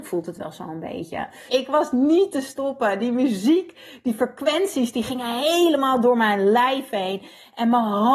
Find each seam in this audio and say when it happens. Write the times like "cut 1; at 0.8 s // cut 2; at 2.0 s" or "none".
cut 1; at 1.5 s